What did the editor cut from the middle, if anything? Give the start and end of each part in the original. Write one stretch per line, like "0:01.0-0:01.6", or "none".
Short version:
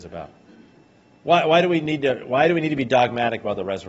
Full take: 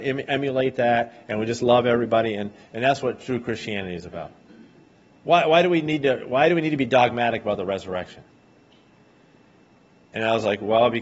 none